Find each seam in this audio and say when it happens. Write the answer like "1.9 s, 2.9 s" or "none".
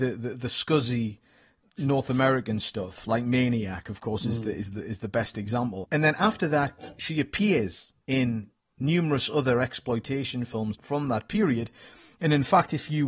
5.8 s, 8.0 s, 10.7 s